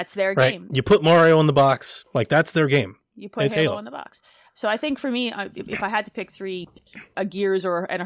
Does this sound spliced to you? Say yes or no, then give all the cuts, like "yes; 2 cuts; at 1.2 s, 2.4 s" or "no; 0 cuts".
yes; 1 cut; at 7.1 s